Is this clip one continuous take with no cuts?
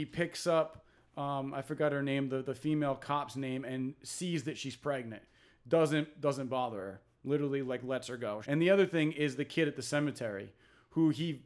no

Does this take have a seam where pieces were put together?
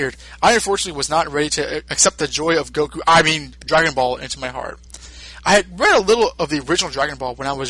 no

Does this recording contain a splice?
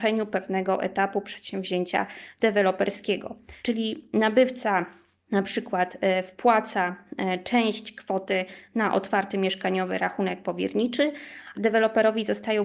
yes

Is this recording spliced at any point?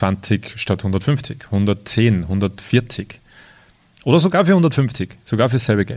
no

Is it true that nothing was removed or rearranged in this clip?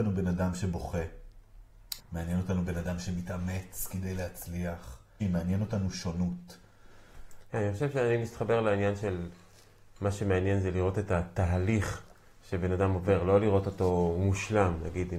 no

